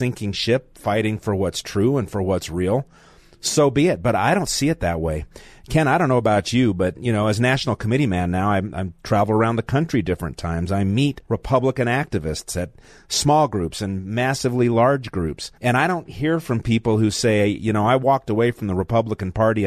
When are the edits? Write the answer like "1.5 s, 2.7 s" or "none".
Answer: 11.2 s, 15.6 s